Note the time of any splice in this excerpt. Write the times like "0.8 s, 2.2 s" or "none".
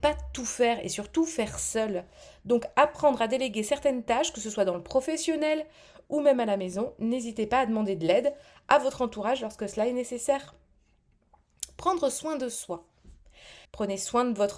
13.7 s

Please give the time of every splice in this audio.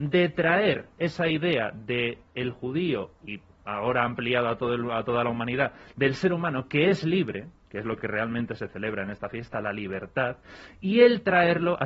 none

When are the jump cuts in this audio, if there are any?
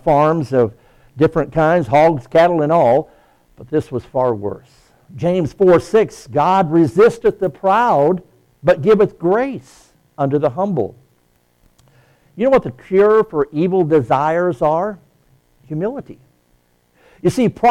5.1 s

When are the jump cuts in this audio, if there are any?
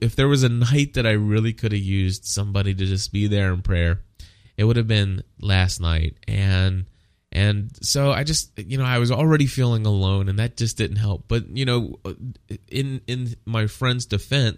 none

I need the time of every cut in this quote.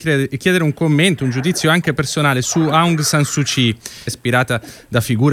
4.1 s

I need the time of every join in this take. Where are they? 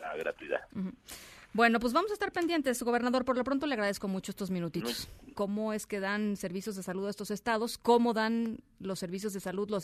5.3 s

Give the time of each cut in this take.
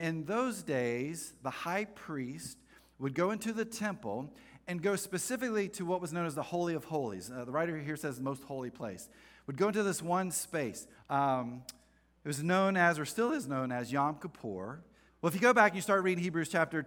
11.0 s, 15.1 s

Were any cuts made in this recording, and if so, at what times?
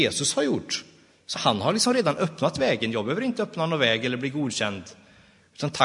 1.3 s

